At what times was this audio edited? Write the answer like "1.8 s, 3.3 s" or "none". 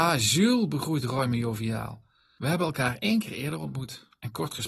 none